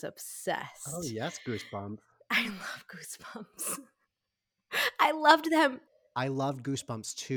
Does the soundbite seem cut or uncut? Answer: uncut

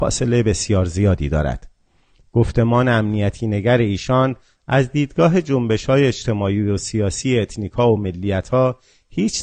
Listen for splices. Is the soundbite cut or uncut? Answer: uncut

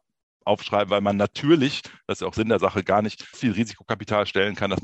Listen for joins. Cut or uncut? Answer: cut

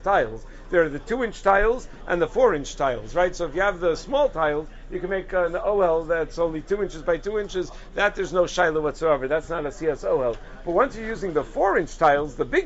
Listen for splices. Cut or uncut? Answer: uncut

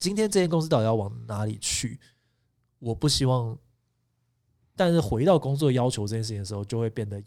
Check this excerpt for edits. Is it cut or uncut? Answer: cut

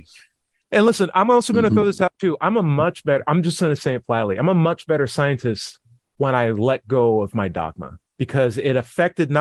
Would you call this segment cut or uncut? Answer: uncut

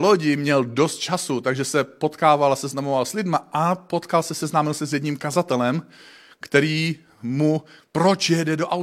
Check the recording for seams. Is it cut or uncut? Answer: cut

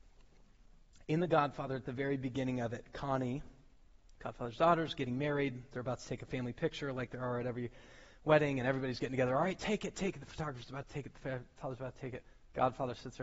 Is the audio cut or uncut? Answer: uncut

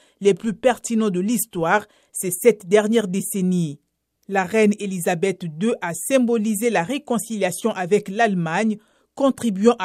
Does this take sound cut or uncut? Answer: cut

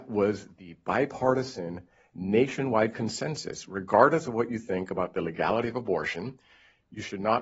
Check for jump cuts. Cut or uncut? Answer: uncut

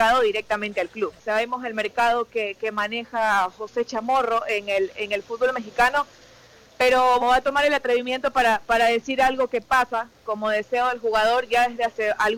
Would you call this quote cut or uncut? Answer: cut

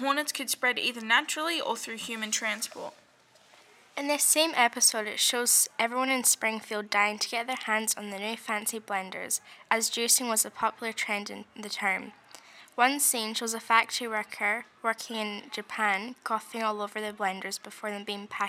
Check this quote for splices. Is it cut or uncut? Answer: uncut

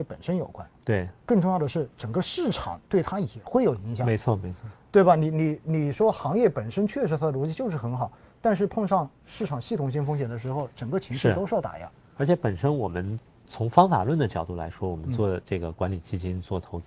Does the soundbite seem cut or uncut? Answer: uncut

